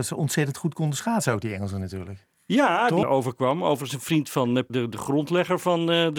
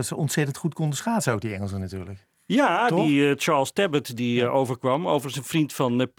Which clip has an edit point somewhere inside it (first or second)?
first